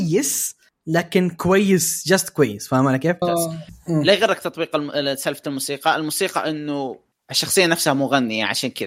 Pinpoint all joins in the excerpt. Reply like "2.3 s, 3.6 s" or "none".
3.2 s